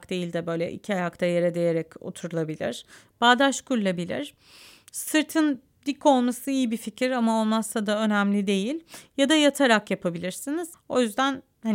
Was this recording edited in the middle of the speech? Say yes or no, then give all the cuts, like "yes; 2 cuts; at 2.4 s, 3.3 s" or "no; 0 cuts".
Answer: yes; 1 cut; at 10.7 s